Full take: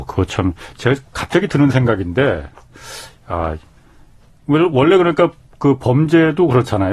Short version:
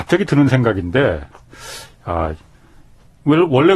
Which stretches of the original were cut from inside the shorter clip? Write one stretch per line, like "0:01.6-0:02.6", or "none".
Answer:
none